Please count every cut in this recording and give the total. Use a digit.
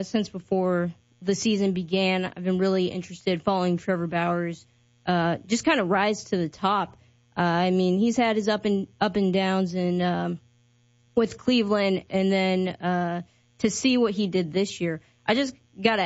0